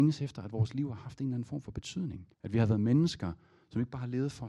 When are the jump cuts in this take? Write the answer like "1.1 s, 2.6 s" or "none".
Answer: 2.3 s